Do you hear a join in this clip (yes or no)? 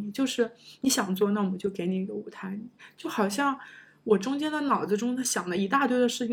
no